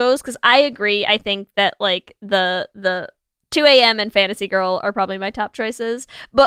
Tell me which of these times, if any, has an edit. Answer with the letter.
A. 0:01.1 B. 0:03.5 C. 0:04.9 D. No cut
D